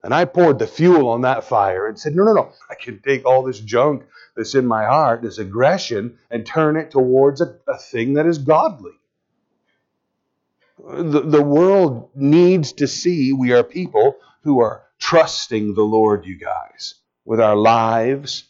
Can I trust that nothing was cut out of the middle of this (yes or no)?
no